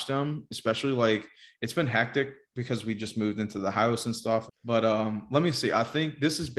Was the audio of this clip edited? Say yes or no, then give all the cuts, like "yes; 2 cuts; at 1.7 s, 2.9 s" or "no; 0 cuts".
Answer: yes; 1 cut; at 4.5 s